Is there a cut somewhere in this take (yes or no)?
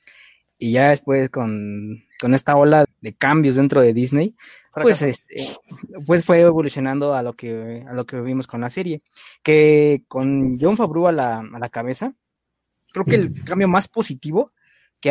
yes